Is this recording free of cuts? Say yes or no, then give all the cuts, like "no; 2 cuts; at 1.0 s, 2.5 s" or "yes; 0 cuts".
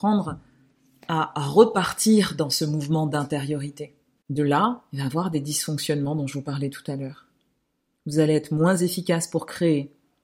no; 1 cut; at 4.2 s